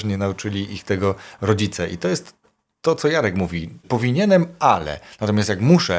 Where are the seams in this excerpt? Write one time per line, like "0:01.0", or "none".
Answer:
0:03.8